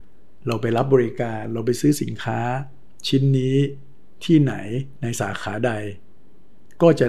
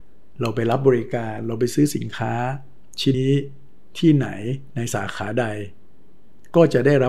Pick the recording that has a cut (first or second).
second